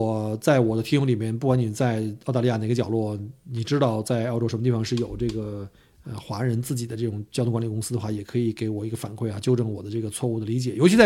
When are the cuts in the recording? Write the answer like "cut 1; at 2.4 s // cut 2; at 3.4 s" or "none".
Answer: none